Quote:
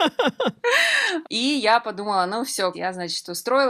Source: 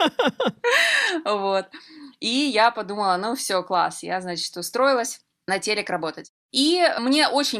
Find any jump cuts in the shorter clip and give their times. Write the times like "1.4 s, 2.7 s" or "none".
1.2 s, 2.7 s